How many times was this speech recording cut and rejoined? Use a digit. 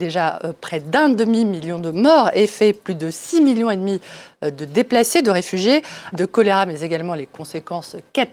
1